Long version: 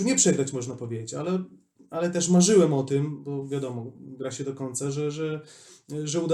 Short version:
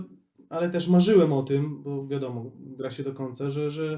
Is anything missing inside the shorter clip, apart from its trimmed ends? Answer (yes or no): no